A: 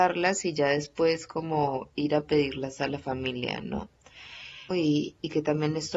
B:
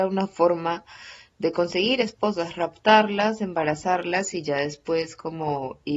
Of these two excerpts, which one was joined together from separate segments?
A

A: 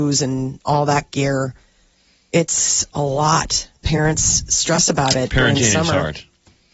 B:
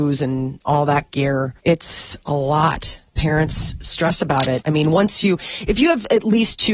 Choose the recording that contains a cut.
B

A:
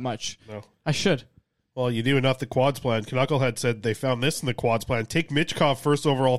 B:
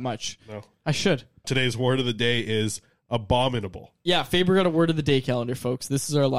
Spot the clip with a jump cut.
B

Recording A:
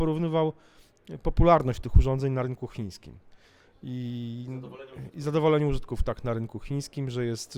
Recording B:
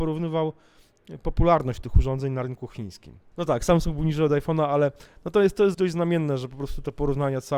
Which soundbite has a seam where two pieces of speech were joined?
B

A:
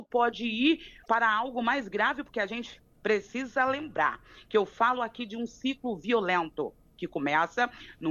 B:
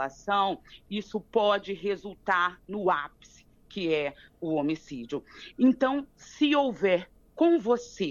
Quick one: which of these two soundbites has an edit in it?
A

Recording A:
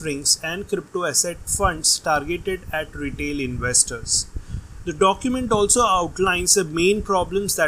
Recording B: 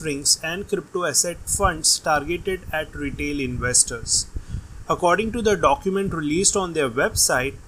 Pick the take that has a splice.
A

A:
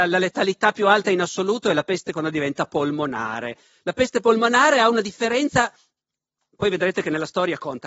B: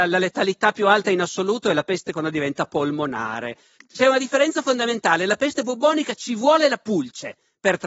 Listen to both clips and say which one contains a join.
B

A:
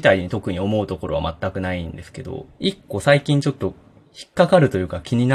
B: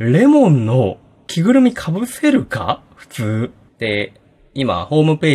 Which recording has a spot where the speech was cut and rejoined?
B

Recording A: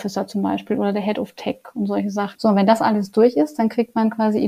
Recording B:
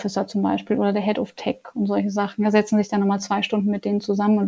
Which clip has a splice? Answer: A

